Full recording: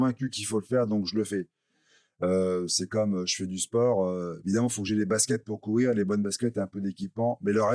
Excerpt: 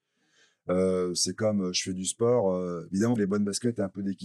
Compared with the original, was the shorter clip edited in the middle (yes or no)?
yes